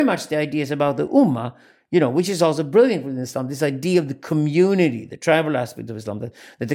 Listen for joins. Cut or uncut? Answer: uncut